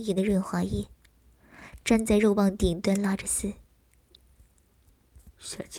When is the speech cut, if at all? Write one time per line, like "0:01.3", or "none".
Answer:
none